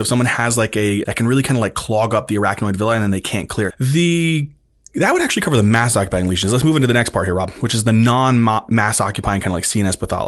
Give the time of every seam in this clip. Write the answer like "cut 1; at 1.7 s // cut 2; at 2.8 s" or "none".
cut 1; at 1.0 s // cut 2; at 3.7 s